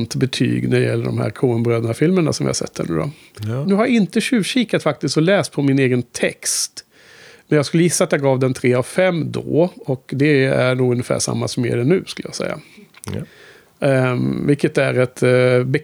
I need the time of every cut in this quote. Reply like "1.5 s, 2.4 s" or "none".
3.6 s